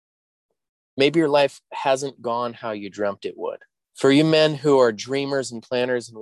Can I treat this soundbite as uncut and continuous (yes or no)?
no